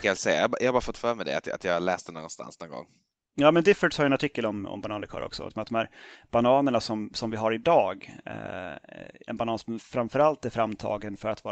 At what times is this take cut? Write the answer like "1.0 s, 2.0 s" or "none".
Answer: 5.5 s, 9.3 s